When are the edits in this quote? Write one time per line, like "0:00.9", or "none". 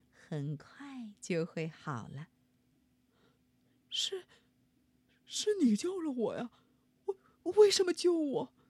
none